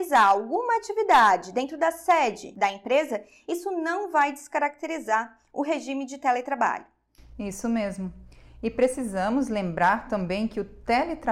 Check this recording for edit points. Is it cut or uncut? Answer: uncut